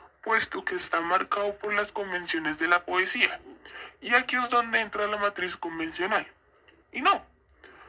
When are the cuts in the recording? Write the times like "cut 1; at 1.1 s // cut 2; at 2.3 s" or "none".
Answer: cut 1; at 6.8 s